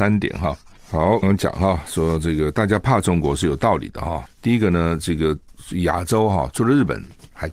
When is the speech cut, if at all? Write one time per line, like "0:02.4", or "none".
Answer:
0:01.2